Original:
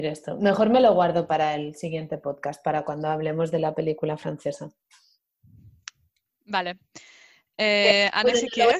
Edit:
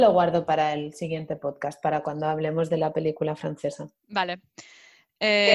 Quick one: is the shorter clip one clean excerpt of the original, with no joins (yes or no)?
no